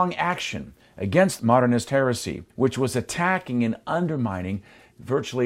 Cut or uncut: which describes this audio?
cut